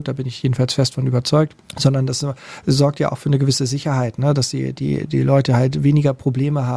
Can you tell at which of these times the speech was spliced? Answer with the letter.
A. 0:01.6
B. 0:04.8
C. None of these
A